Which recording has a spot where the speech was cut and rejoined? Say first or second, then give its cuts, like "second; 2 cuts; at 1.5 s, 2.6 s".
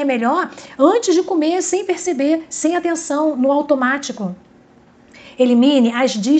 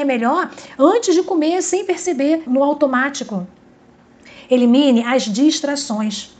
second; 1 cut; at 2.5 s